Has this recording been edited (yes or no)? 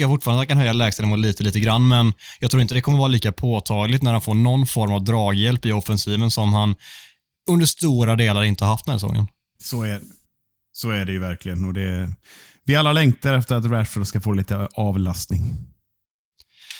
yes